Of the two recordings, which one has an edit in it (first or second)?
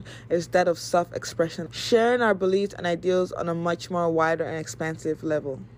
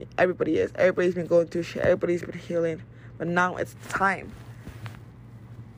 first